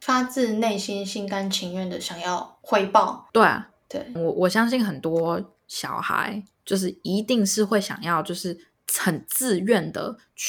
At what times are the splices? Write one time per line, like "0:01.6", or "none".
0:04.2